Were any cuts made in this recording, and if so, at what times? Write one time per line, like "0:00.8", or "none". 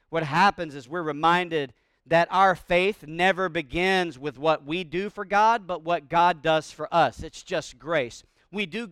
none